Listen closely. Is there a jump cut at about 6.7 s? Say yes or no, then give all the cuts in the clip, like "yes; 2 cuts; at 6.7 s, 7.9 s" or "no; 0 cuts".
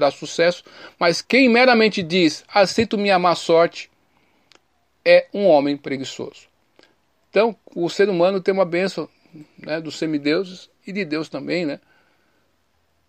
no; 2 cuts; at 1.2 s, 10.8 s